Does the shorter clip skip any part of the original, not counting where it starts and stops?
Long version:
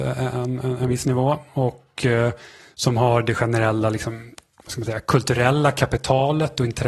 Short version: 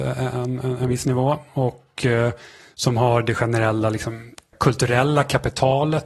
yes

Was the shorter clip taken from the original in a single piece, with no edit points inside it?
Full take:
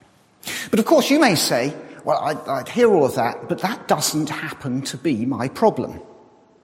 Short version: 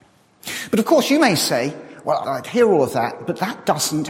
no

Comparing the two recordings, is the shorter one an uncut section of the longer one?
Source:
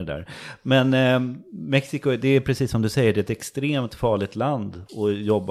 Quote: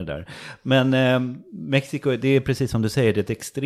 yes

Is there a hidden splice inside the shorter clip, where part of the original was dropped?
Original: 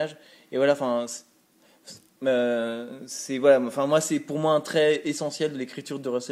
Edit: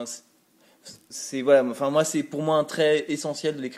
yes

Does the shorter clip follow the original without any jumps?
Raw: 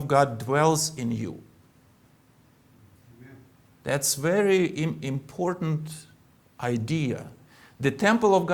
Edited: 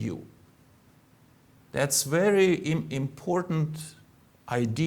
no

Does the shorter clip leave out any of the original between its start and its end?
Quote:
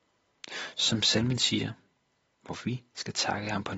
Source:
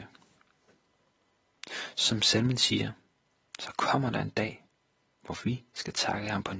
yes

